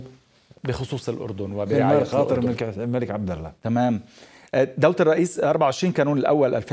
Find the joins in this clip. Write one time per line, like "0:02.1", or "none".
none